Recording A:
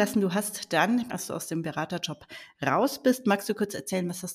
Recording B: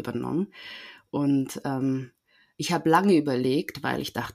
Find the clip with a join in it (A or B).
A